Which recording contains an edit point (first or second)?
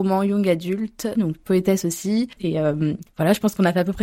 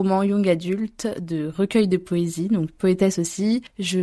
first